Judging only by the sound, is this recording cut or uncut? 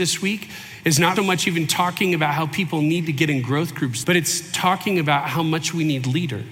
cut